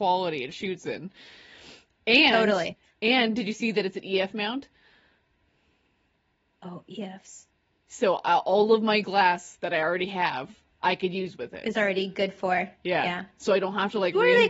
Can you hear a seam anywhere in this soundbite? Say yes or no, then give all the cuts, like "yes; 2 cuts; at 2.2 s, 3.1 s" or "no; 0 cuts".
no; 0 cuts